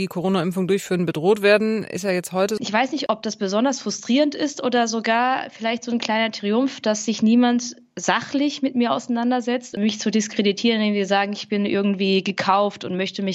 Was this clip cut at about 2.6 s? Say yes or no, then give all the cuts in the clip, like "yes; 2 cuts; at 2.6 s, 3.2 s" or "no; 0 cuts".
yes; 2 cuts; at 2.6 s, 9.7 s